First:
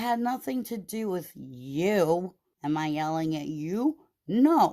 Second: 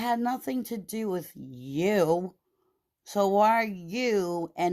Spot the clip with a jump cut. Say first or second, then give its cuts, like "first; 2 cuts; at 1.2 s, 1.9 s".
first; 1 cut; at 2.5 s